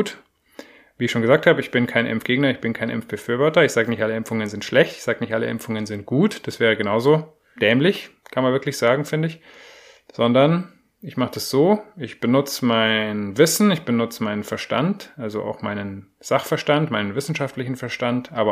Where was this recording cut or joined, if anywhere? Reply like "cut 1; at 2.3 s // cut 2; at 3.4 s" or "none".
cut 1; at 7.6 s